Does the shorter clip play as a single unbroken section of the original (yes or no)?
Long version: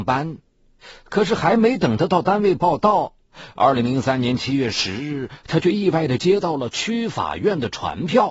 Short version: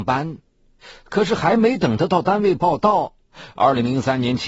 yes